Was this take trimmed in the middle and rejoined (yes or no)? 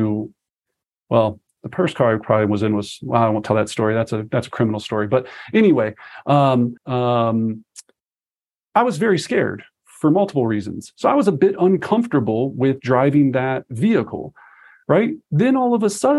yes